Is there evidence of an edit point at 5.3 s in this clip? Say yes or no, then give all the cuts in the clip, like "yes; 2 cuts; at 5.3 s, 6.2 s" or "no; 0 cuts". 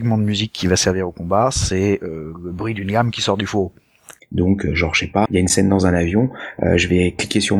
yes; 2 cuts; at 4.2 s, 5.3 s